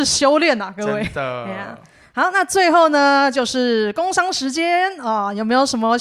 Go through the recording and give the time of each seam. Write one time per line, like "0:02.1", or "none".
none